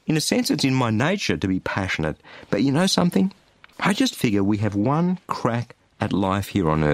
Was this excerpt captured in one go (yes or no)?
yes